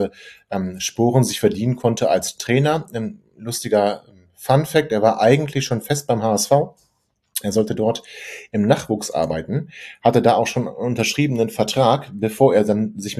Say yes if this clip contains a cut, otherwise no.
no